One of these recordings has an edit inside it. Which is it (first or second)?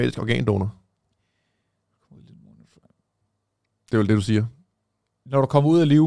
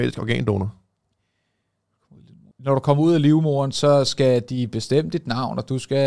second